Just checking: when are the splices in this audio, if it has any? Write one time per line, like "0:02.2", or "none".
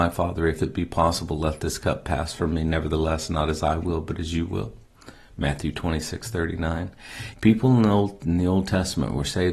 0:07.3